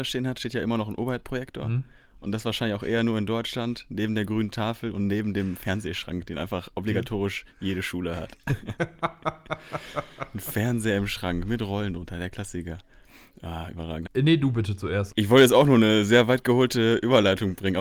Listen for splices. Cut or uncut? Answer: cut